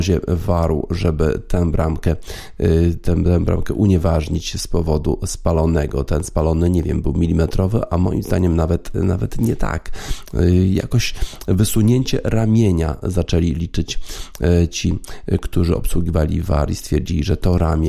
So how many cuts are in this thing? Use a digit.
0